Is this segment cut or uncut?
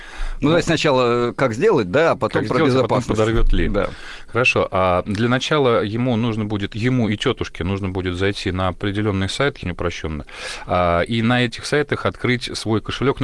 cut